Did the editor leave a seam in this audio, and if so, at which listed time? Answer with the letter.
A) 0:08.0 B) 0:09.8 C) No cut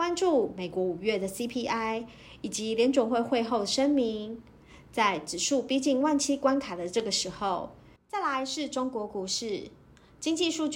A